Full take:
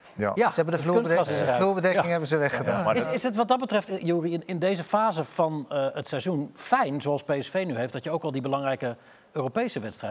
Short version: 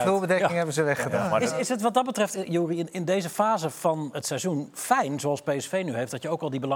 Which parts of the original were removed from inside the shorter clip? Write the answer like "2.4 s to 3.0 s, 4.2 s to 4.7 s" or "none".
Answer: 5.7 s to 5.9 s